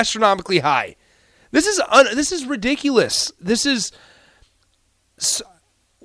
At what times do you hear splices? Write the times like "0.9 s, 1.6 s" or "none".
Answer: none